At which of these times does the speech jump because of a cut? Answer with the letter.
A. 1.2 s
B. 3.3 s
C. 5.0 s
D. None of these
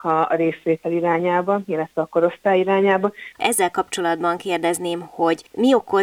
B